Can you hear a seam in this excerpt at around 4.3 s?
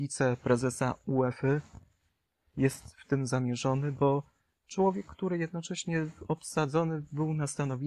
no; 0 cuts

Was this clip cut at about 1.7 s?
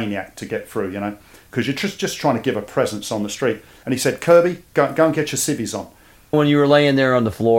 no; 2 cuts; at 3.8 s, 6.3 s

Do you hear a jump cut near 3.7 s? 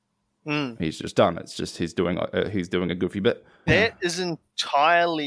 yes; 1 cut; at 3.7 s

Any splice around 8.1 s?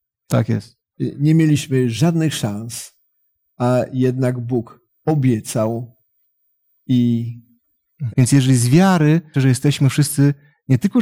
yes; 2 cuts; at 8.1 s, 9.3 s

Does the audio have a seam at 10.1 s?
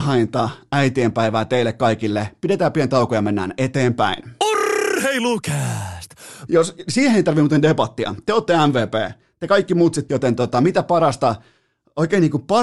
yes; 2 cuts; at 6.5 s, 10.1 s

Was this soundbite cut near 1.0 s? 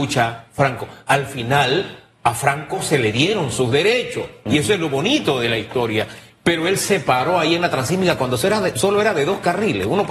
no; 1 cut; at 6.3 s

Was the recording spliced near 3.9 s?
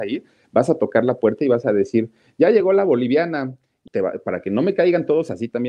yes; 1 cut; at 3.9 s

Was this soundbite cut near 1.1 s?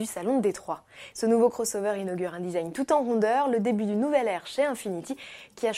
yes; 1 cut; at 1.1 s

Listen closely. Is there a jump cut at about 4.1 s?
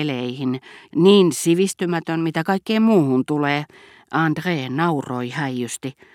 no; 1 cut; at 0.9 s

